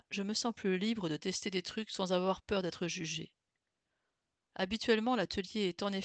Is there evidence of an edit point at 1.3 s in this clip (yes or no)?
no